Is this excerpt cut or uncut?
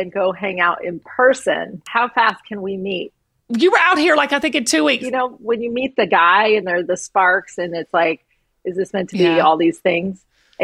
cut